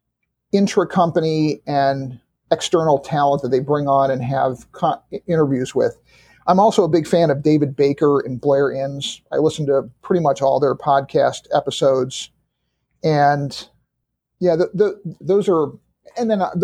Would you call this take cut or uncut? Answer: cut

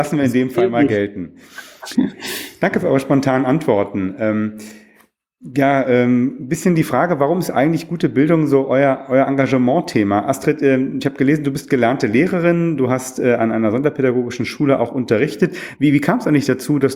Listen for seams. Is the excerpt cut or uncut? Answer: uncut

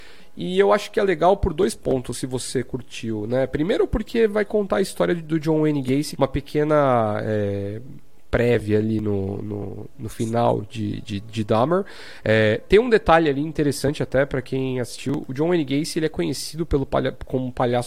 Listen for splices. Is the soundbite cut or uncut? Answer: cut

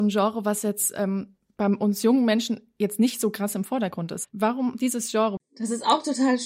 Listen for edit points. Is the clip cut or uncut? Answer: cut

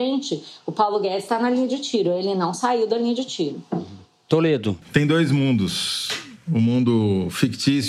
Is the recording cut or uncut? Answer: cut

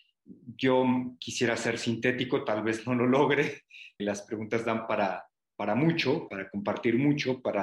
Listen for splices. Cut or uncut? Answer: cut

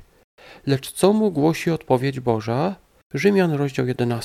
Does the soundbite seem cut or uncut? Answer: cut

